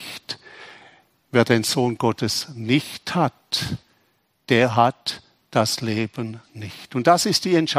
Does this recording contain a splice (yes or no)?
no